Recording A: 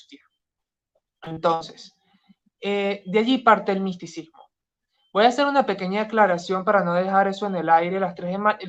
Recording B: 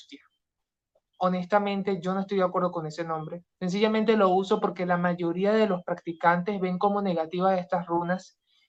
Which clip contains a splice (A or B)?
B